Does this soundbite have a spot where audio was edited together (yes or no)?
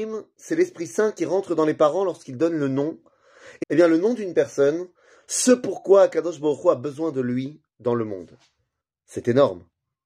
yes